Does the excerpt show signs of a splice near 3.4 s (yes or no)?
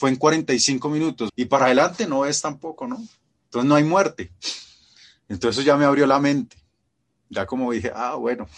no